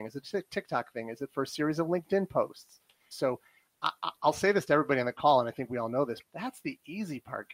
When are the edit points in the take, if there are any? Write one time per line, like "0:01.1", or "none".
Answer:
0:03.1
0:06.2

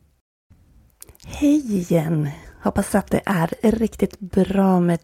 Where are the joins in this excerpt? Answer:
0:03.6

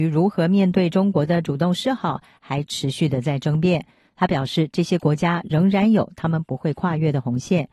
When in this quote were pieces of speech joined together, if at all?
0:04.0

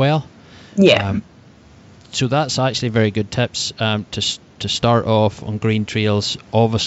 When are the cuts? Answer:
none

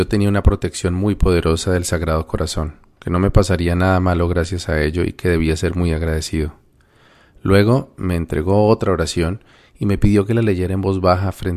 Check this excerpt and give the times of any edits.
none

